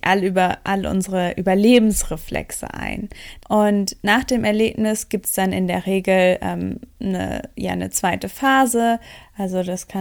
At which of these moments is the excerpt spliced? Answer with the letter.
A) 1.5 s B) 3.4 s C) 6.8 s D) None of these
B